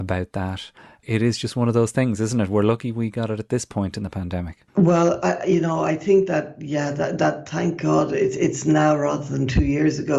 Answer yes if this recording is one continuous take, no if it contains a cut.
no